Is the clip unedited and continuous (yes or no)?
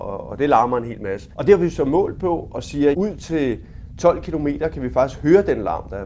no